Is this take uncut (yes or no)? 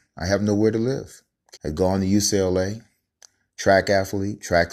no